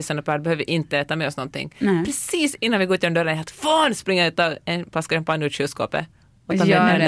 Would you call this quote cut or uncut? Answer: uncut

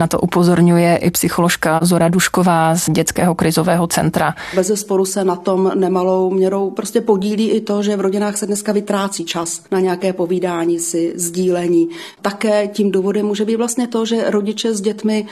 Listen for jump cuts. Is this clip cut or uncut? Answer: uncut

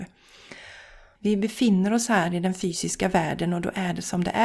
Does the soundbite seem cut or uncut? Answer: cut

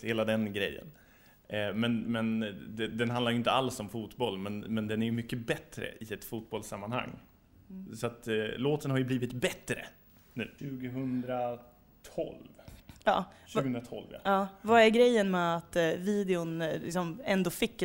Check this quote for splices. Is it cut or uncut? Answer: cut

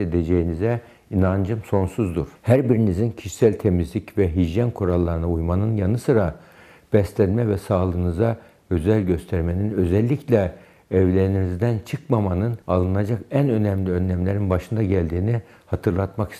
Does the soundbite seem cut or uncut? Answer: cut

